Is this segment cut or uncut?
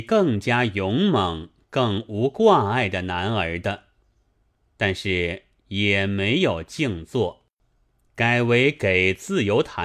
uncut